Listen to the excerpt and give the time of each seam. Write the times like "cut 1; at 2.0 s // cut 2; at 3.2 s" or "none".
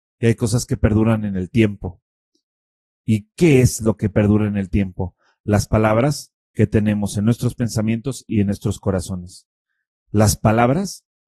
none